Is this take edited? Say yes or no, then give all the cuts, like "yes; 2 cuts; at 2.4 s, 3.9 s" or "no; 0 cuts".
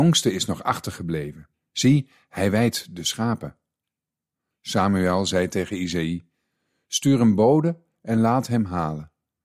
no; 0 cuts